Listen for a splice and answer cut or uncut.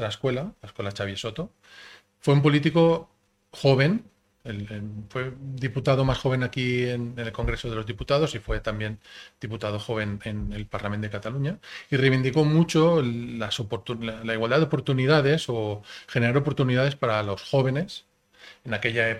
uncut